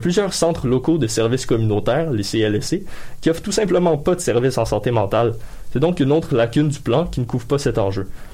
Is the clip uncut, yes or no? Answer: yes